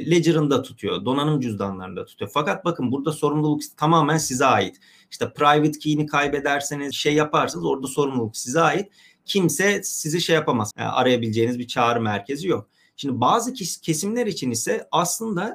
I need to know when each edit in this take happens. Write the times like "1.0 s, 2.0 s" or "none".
6.9 s, 10.7 s